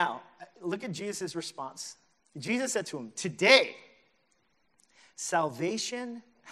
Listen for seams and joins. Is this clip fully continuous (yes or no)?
yes